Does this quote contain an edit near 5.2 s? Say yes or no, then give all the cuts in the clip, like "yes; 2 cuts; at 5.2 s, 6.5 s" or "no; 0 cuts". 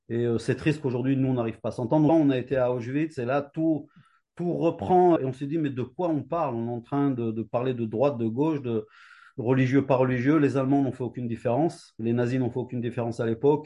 yes; 2 cuts; at 2.1 s, 5.2 s